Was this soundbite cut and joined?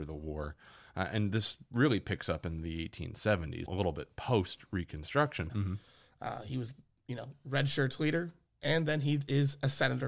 yes; 2 cuts; at 3.7 s, 5.5 s

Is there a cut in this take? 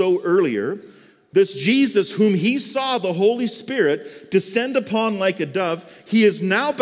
no; 0 cuts

